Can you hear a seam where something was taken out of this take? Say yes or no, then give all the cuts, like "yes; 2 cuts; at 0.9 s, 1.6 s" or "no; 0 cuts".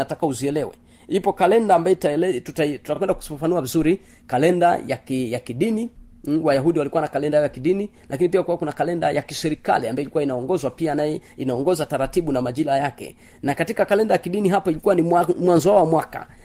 no; 0 cuts